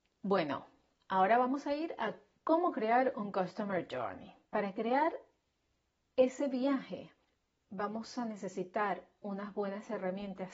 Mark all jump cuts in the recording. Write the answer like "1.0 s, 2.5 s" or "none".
none